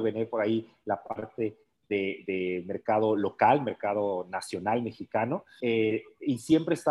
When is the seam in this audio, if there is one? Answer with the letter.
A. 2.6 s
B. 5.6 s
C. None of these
B